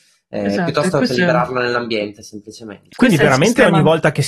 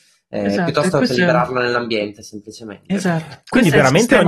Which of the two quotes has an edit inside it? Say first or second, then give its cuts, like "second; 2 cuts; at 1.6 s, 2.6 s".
first; 1 cut; at 2.9 s